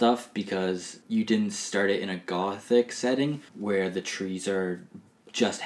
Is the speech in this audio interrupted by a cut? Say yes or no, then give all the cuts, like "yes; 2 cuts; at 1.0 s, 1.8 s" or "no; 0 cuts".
yes; 2 cuts; at 1.0 s, 3.5 s